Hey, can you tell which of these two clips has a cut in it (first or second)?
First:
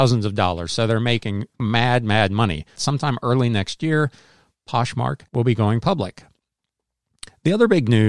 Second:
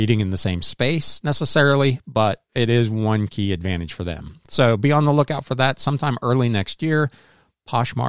first